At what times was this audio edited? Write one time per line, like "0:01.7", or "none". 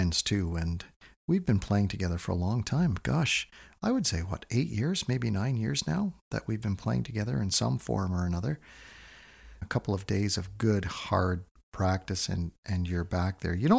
0:09.6